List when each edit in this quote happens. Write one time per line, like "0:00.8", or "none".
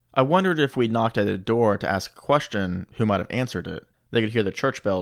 0:03.9